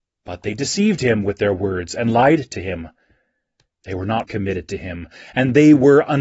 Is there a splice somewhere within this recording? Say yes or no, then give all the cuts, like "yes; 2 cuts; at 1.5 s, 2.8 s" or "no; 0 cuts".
yes; 1 cut; at 4.2 s